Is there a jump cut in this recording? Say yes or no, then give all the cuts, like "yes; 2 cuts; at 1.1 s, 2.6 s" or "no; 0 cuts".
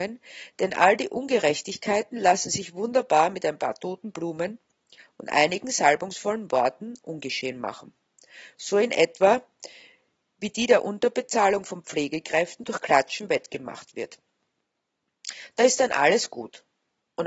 no; 0 cuts